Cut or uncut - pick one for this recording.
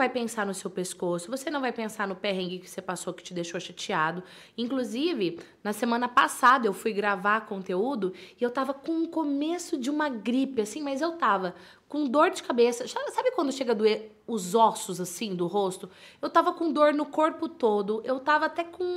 uncut